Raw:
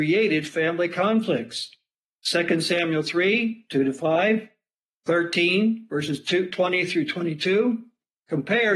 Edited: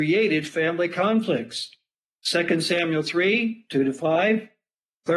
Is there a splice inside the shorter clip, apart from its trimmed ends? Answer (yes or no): no